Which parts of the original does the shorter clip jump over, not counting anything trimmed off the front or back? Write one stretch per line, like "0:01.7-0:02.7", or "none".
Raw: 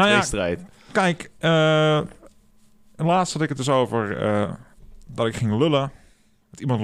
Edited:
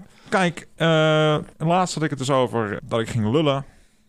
0:02.2-0:02.9
0:04.2-0:05.0